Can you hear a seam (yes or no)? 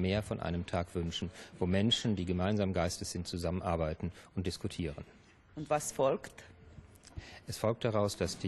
no